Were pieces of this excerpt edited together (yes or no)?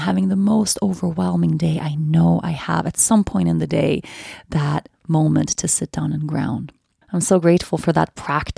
yes